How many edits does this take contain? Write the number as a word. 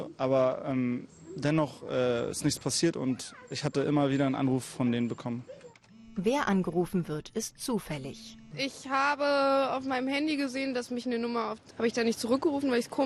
two